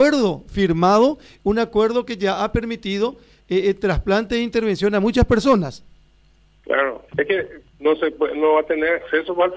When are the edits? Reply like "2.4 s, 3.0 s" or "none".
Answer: 7.1 s